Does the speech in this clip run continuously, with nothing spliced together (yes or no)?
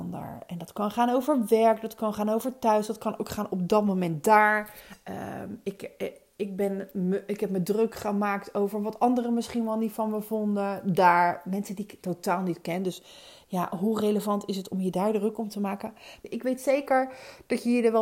no